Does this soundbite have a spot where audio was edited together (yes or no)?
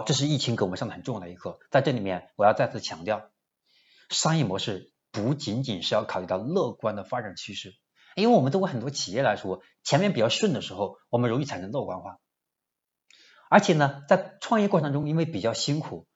no